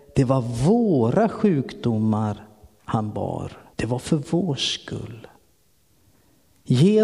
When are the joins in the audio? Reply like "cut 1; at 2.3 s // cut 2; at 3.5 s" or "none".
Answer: cut 1; at 3.7 s